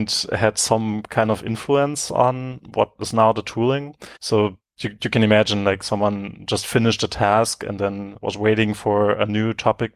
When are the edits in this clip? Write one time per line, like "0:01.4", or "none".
0:04.2
0:08.2

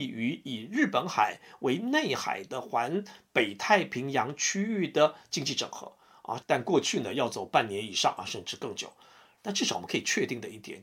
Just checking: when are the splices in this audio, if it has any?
0:06.4
0:09.4

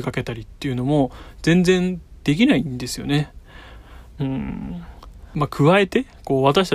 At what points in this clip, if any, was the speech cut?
0:04.2

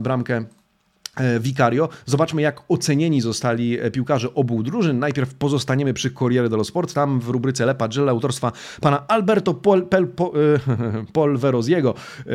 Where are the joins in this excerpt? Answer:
none

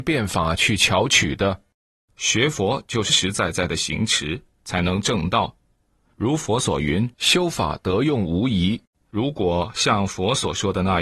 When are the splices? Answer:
0:03.1
0:06.1
0:07.1

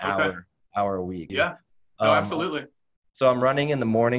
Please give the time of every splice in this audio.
0:01.3

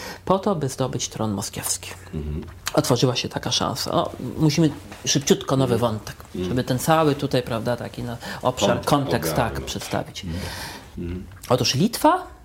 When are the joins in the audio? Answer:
0:08.8
0:10.9

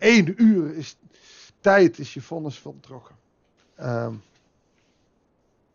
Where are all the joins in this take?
0:03.6

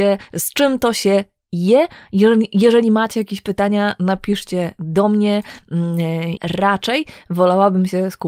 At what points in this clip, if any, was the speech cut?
0:06.4

